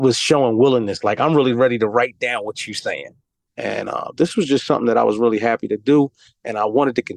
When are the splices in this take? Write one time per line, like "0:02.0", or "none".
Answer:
0:03.5